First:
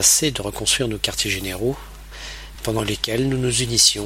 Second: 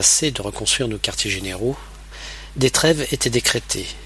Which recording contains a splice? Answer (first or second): first